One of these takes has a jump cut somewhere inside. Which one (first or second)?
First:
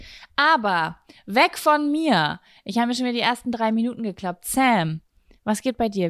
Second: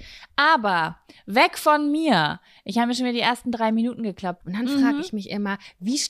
second